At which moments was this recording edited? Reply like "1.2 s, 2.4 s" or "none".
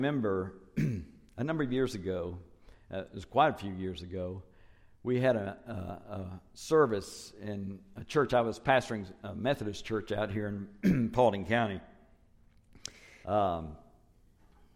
13.2 s